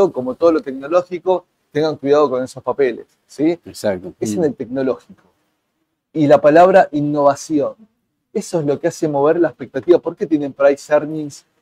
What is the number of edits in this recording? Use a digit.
1